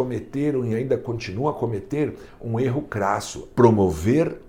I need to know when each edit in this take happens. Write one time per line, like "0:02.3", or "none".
0:03.5